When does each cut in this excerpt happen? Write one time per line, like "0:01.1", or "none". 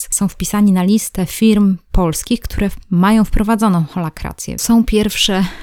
0:04.6